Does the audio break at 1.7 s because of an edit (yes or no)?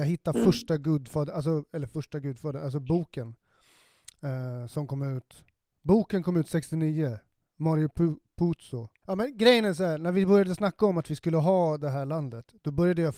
no